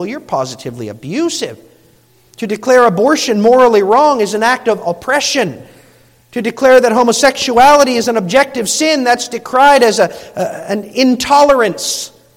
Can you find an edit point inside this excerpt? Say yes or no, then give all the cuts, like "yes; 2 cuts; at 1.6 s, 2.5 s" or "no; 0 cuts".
no; 0 cuts